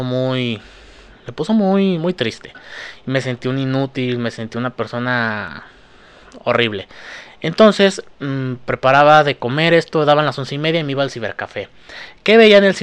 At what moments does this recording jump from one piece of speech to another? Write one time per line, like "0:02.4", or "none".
none